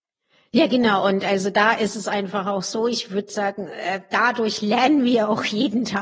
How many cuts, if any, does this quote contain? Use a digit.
0